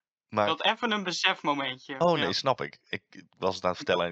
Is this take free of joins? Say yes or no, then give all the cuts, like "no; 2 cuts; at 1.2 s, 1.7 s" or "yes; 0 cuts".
yes; 0 cuts